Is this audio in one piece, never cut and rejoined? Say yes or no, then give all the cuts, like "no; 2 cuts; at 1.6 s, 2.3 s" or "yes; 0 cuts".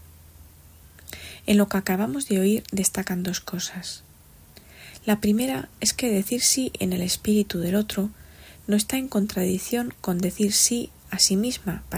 yes; 0 cuts